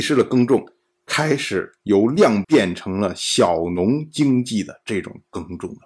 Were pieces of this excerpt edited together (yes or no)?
yes